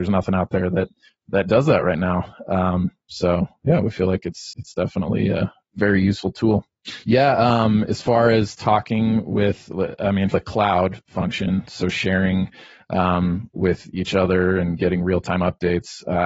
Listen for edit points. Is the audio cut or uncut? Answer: cut